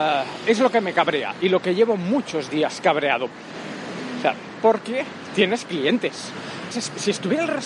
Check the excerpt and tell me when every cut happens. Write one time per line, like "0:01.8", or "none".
0:03.3
0:04.6
0:06.7